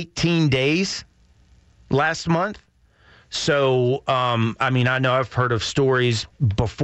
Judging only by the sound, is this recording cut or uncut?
uncut